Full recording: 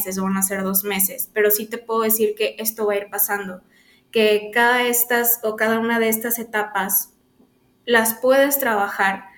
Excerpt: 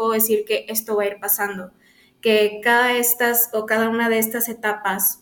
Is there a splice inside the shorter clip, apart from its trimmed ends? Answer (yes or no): no